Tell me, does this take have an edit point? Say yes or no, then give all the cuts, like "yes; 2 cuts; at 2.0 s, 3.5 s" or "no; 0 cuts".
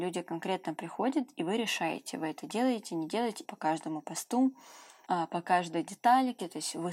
yes; 2 cuts; at 3.4 s, 5.0 s